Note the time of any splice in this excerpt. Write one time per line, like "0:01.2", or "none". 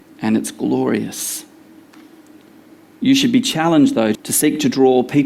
0:04.1

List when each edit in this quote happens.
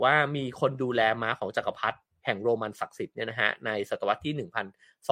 none

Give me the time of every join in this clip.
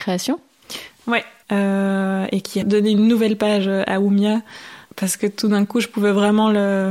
0:01.4
0:02.6
0:04.9

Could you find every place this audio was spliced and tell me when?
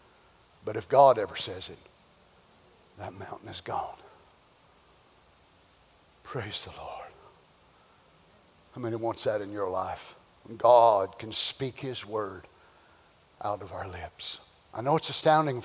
none

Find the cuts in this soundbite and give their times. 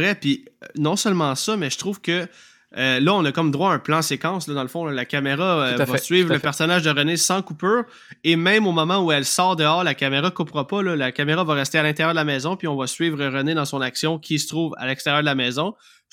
none

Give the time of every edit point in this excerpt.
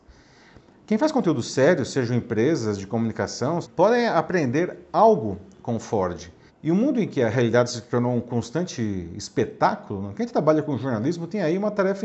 0:03.6
0:06.5

